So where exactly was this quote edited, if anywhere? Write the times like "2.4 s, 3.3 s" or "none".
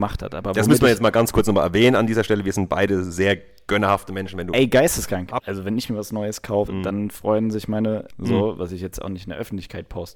5.4 s, 6.7 s, 8.1 s